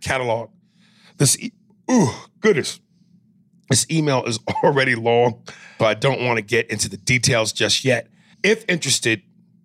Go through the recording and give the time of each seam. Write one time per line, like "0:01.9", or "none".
0:05.8
0:08.3